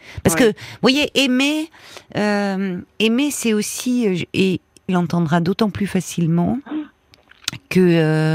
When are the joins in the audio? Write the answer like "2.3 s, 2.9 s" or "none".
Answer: 4.9 s